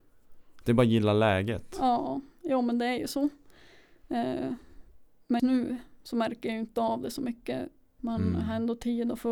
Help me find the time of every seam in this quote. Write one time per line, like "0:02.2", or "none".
0:05.4
0:08.0